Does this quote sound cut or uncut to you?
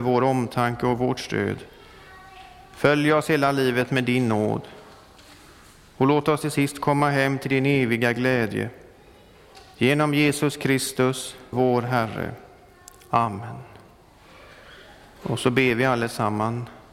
cut